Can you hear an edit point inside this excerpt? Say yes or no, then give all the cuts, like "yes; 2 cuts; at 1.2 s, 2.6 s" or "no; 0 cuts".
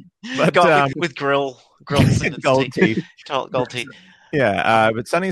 yes; 1 cut; at 0.9 s